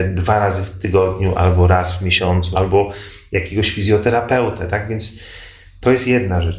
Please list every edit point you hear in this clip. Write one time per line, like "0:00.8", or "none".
0:02.5